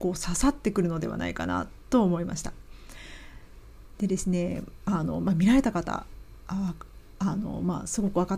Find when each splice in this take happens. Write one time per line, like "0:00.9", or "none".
none